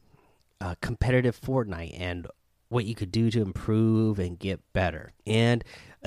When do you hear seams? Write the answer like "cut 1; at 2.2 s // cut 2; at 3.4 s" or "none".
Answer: cut 1; at 5.2 s